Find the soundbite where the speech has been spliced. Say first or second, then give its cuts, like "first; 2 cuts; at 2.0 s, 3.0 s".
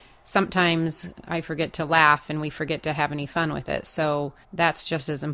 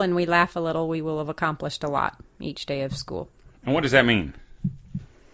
first; 1 cut; at 4.4 s